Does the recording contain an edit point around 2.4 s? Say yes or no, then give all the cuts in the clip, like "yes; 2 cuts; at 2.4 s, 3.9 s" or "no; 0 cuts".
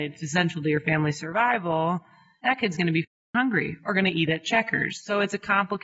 yes; 1 cut; at 2.4 s